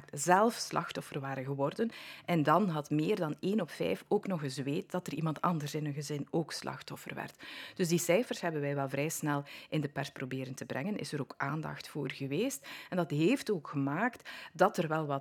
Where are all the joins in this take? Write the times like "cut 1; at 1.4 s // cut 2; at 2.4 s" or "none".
none